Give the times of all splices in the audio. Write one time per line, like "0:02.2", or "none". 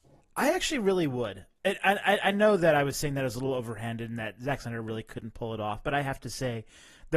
0:01.6